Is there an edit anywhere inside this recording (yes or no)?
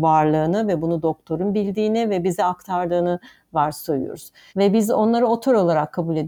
yes